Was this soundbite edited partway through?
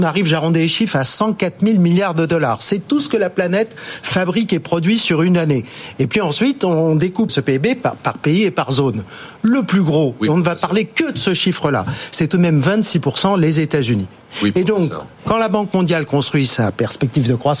yes; 1 cut; at 7.3 s

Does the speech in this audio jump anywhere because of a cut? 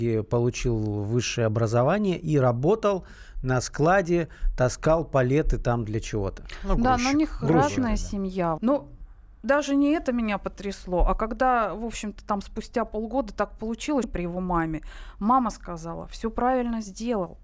yes; 2 cuts; at 8.6 s, 14.0 s

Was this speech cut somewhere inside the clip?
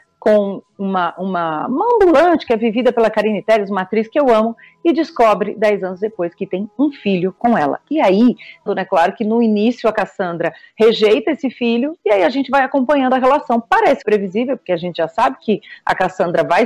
yes; 2 cuts; at 8.7 s, 14.0 s

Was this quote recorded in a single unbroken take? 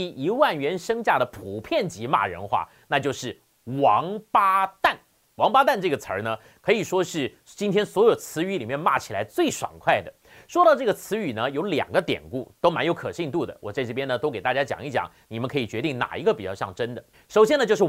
yes; 0 cuts

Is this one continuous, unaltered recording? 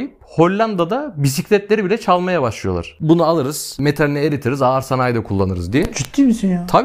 yes; 0 cuts

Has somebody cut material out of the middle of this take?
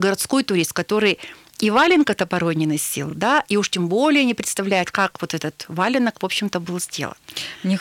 no; 0 cuts

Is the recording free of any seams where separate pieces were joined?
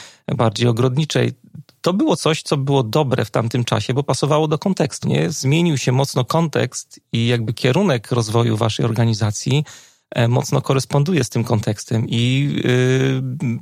no; 1 cut; at 5.0 s

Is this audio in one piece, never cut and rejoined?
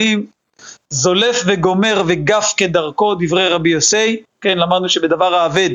yes; 0 cuts

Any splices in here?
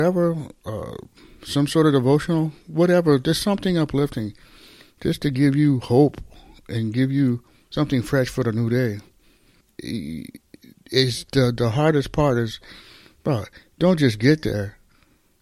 yes; 1 cut; at 9.6 s

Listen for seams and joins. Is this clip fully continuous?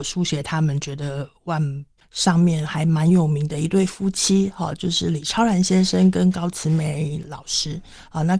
no; 1 cut; at 2.0 s

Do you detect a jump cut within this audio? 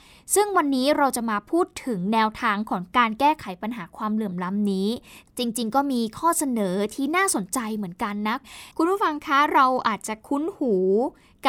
yes; 1 cut; at 8.7 s

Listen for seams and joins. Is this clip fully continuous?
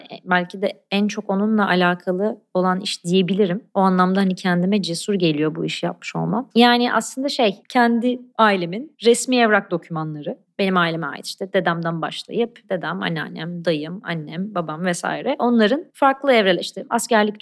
yes; 0 cuts

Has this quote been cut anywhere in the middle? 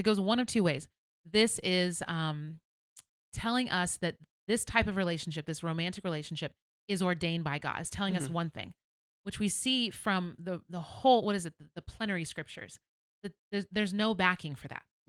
no; 0 cuts

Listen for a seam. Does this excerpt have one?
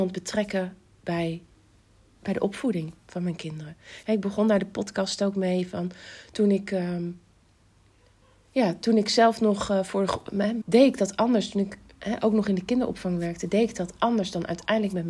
yes; 2 cuts; at 4.0 s, 10.6 s

